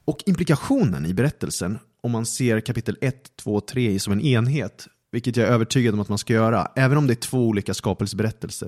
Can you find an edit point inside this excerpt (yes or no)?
no